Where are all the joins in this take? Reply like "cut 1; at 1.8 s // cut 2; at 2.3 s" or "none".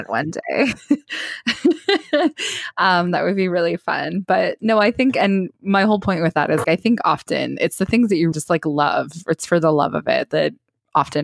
cut 1; at 6.6 s // cut 2; at 8.3 s